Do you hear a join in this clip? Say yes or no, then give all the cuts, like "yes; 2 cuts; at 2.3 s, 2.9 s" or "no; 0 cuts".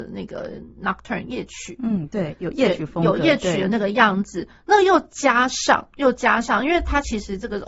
no; 0 cuts